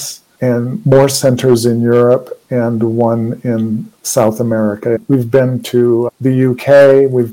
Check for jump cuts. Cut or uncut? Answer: uncut